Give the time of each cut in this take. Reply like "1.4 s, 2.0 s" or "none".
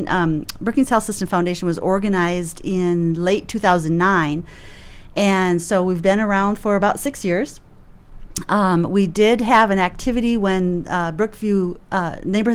none